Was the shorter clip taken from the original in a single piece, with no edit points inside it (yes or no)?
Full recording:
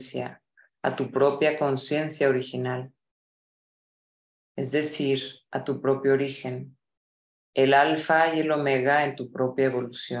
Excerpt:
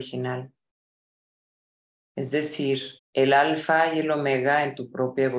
no